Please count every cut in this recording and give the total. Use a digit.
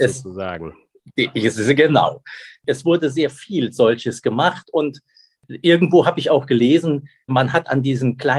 1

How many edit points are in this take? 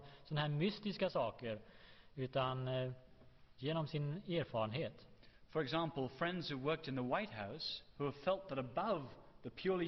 0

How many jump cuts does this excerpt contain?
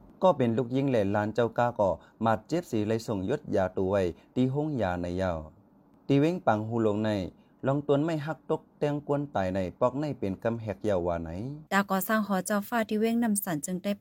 1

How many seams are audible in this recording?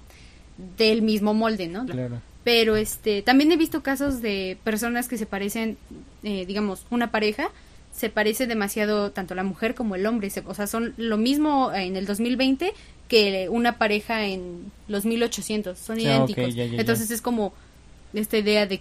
1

